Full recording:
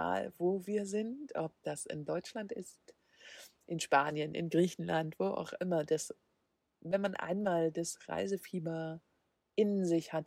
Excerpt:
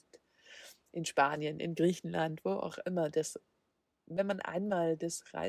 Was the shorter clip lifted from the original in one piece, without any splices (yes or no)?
yes